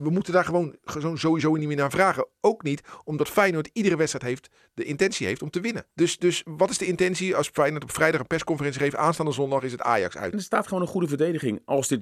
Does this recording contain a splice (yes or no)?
yes